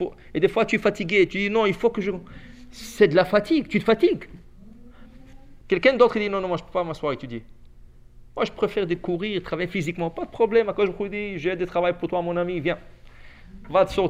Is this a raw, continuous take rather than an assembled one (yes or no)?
no